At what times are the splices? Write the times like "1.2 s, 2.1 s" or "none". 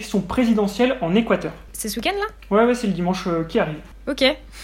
none